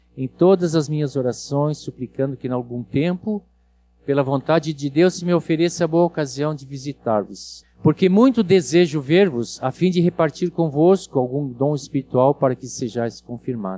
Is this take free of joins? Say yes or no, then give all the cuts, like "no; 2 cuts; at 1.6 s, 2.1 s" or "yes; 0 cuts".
no; 1 cut; at 7.6 s